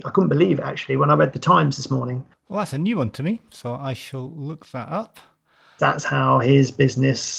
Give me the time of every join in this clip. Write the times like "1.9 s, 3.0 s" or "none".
2.3 s, 5.8 s